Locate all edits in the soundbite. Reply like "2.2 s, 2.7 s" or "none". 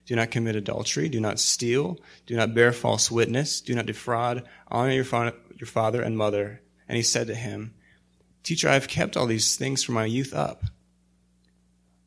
none